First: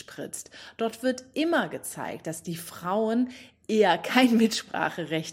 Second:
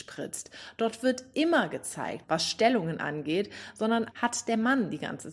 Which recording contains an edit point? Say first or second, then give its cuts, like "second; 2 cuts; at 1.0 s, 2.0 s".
second; 2 cuts; at 2.2 s, 4.1 s